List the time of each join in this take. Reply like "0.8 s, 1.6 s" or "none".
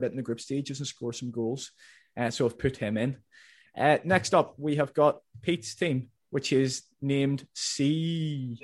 none